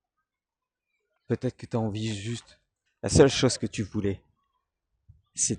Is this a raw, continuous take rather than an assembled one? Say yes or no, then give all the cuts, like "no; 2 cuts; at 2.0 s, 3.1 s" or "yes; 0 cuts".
no; 2 cuts; at 1.2 s, 2.9 s